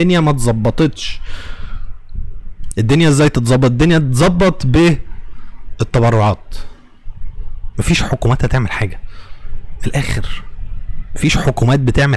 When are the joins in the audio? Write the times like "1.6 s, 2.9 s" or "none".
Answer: 7.7 s